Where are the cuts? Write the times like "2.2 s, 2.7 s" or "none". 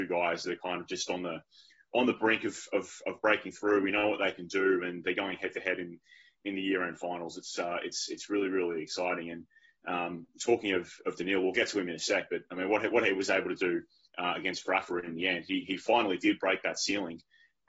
none